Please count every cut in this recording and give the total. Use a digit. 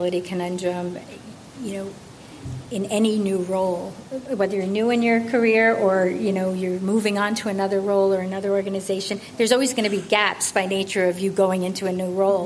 0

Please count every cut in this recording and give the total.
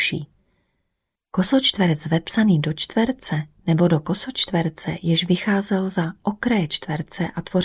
1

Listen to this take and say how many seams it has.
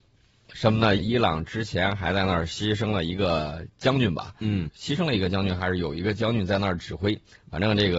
2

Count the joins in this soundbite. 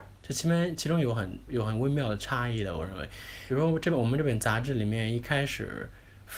1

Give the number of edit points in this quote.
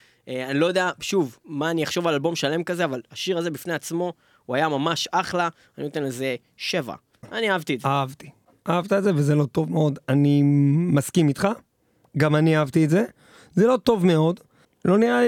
0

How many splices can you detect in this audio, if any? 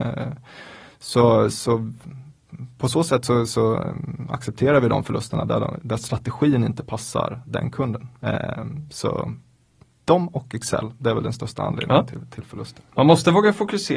0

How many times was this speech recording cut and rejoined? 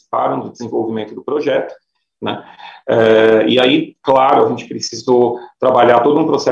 1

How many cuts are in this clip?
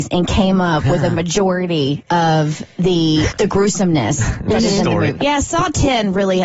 2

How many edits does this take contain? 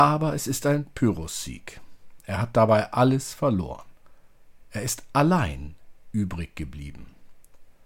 0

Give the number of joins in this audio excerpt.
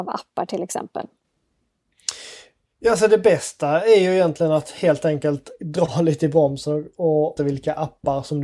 1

